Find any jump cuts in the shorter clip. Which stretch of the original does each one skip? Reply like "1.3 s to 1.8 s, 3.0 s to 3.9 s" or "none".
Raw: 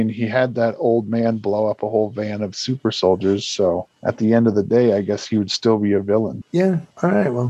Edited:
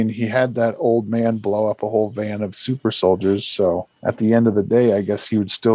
none